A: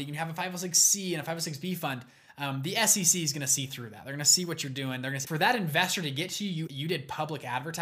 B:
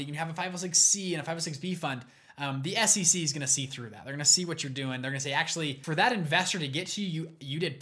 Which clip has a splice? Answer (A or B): A